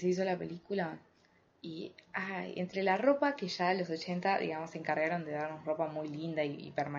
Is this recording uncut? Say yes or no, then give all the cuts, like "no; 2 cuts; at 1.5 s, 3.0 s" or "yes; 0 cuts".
yes; 0 cuts